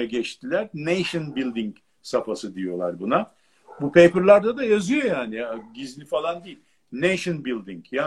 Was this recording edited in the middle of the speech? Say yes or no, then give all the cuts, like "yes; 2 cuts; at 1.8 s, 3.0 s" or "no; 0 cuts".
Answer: no; 0 cuts